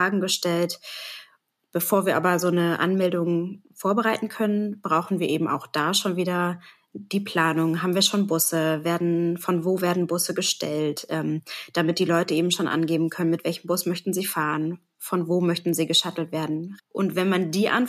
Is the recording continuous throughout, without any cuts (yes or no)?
no